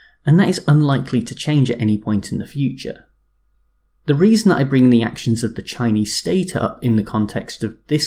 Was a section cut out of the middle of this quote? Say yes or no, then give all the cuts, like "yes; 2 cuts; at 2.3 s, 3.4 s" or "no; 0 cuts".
no; 0 cuts